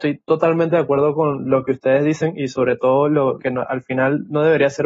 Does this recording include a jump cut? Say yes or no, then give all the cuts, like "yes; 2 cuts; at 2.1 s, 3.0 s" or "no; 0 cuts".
yes; 1 cut; at 3.4 s